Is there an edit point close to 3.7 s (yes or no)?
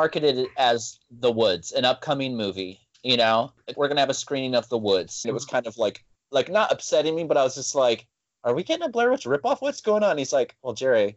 yes